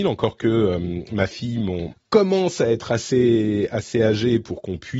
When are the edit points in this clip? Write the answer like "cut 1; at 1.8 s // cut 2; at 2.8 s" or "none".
cut 1; at 1.9 s